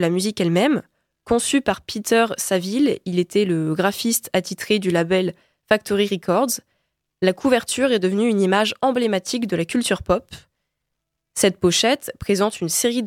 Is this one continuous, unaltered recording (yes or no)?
yes